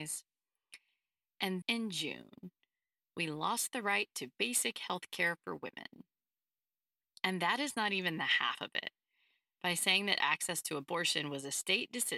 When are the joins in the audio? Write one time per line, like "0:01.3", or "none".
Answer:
0:01.6

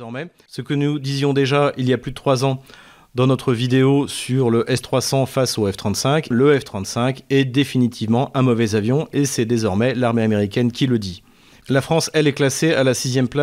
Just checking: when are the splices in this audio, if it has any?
0:06.3
0:11.6

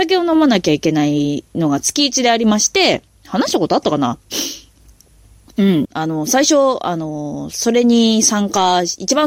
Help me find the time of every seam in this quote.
0:05.8

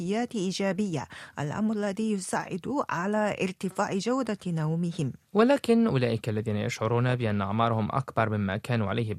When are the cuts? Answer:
0:05.2

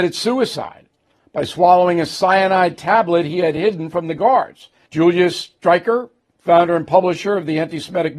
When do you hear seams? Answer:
0:04.9

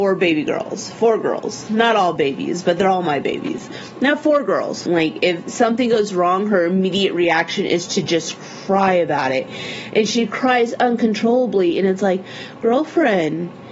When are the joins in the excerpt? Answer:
0:04.9

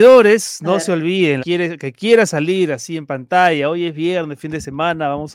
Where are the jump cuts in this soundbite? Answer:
0:01.4

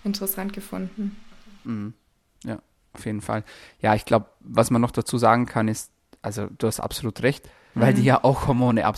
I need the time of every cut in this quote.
0:07.7

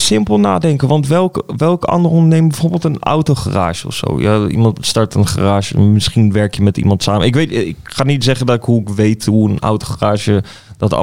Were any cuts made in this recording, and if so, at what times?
none

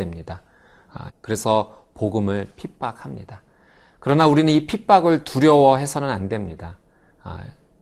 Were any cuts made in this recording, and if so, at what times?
0:01.1

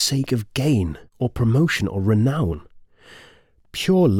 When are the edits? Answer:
none

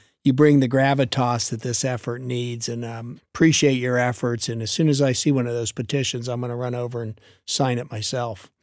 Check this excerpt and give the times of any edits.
0:03.2

